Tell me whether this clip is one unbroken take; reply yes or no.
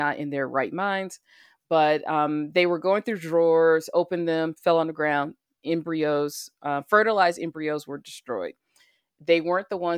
yes